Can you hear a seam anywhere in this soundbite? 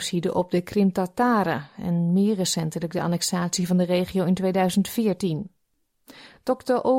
no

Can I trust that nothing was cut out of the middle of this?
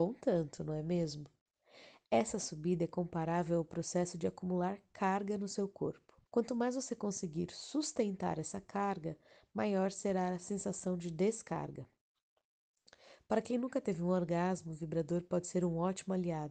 no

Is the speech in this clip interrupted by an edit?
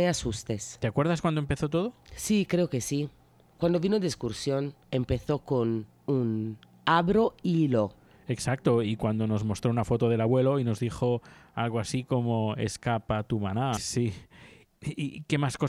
yes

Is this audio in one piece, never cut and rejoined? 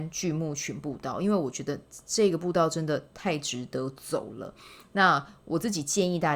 yes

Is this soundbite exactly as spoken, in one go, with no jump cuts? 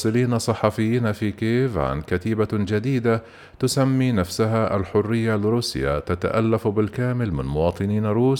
yes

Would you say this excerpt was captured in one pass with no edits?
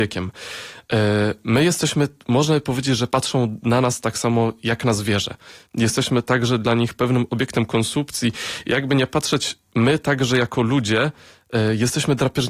yes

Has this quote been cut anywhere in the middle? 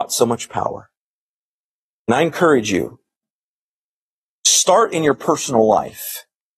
no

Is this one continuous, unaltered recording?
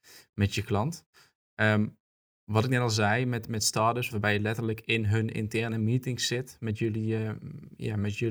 no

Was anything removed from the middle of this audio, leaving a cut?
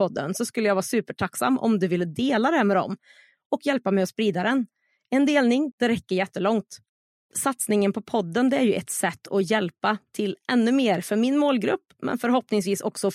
yes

